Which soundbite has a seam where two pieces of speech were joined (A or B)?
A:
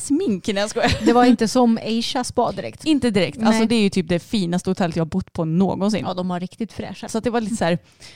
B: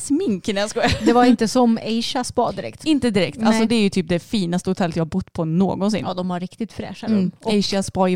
A